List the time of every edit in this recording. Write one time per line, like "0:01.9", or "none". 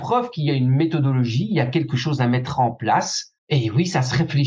0:03.4